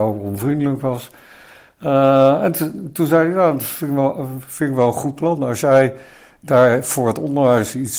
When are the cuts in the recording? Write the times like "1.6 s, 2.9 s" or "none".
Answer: none